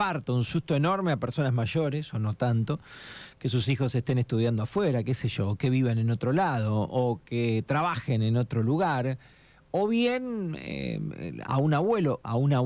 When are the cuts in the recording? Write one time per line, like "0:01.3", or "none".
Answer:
0:11.5

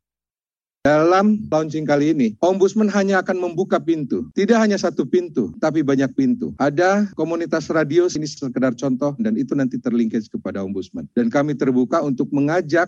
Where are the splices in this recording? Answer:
0:09.2

